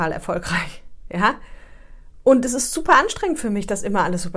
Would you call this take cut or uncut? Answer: uncut